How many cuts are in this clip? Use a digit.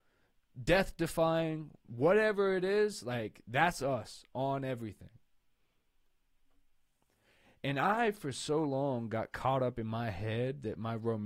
0